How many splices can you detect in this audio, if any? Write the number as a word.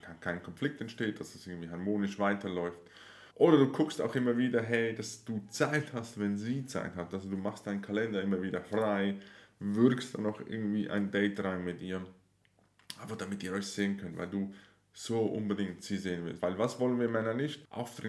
two